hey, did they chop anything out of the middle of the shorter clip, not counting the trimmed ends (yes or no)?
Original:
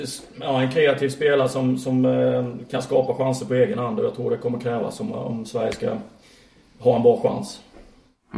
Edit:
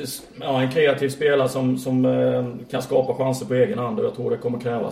no